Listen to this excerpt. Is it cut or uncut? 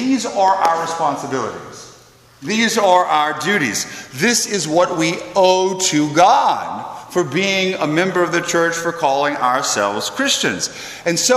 uncut